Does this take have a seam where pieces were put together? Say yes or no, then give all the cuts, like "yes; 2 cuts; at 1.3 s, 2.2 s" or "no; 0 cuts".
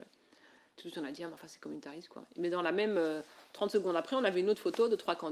no; 0 cuts